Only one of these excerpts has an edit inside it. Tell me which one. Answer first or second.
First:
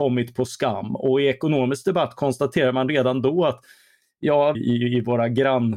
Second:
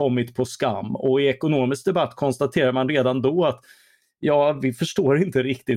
first